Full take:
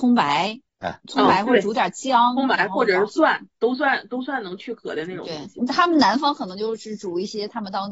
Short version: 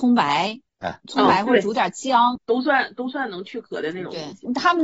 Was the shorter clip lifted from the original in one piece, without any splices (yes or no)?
no